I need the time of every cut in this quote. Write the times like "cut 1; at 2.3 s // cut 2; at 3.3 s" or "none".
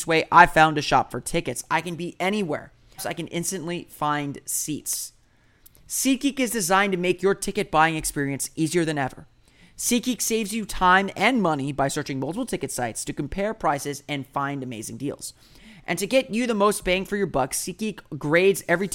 cut 1; at 3.0 s